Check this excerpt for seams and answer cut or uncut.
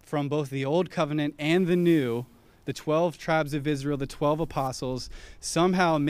uncut